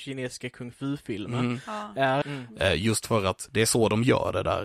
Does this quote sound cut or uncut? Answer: cut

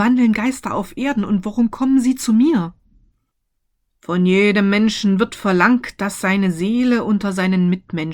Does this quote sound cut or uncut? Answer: uncut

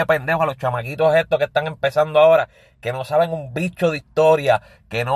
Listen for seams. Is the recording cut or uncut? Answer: uncut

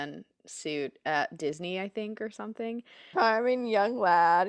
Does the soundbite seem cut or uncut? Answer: cut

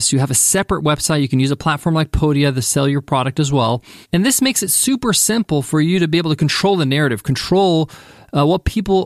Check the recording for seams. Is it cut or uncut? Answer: uncut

